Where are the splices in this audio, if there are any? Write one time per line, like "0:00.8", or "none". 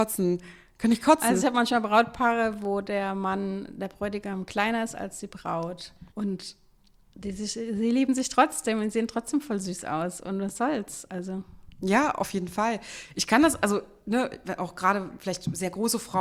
0:06.1